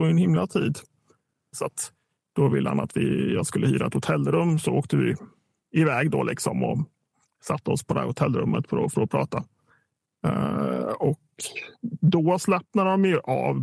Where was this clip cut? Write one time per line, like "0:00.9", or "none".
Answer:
0:01.5